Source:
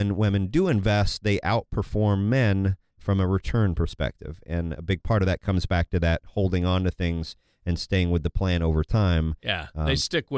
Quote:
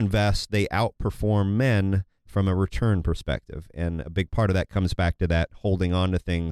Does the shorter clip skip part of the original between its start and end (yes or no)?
no